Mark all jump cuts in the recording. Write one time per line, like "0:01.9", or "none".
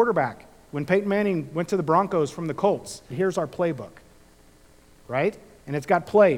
0:03.1